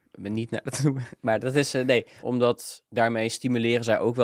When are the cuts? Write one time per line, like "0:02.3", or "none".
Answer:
0:02.2